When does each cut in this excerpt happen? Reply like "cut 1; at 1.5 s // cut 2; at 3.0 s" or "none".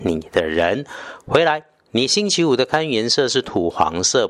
none